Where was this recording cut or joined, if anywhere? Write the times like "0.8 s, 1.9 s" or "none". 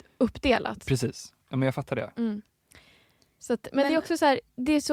none